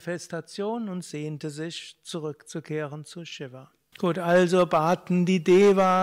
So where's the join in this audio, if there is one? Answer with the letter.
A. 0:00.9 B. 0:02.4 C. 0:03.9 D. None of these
C